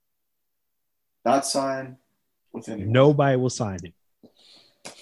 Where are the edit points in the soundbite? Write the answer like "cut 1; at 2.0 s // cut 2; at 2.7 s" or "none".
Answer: none